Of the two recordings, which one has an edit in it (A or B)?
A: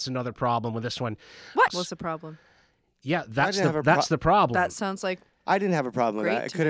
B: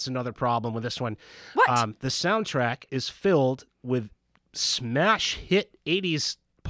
A